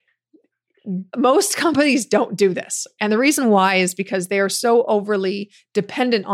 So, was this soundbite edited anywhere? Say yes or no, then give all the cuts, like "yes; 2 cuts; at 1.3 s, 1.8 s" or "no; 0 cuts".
yes; 1 cut; at 1.1 s